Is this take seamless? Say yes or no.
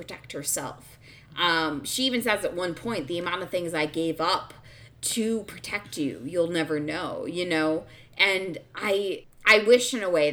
yes